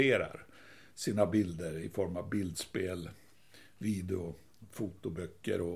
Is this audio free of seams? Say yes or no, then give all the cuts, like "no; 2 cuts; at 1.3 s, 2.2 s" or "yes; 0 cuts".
yes; 0 cuts